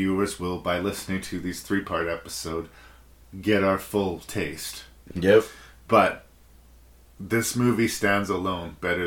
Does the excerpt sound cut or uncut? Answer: cut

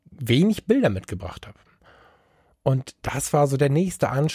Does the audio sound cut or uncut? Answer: uncut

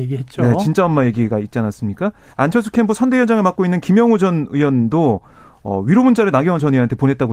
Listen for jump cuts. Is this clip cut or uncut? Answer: cut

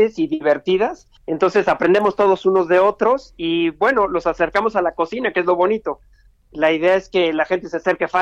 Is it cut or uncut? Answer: cut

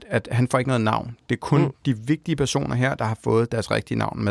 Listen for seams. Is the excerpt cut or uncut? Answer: uncut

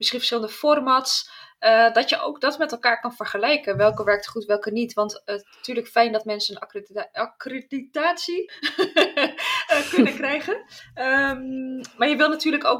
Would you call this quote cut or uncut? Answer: cut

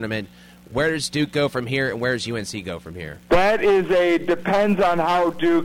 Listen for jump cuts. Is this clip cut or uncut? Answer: cut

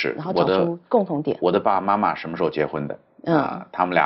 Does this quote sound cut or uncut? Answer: uncut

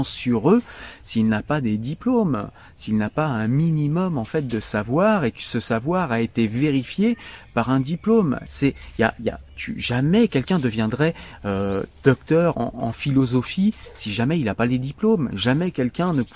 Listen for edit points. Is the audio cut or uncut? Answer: cut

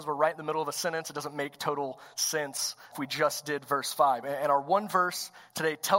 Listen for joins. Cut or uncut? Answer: cut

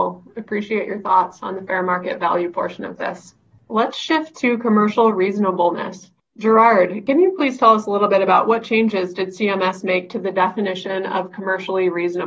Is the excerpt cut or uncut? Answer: uncut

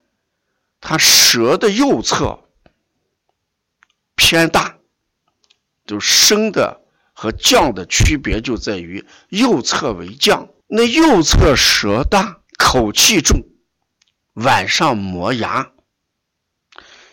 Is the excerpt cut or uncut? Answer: cut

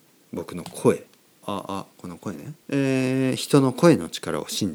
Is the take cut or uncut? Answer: cut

